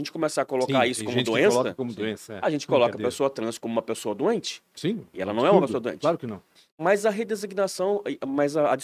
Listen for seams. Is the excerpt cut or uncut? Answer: uncut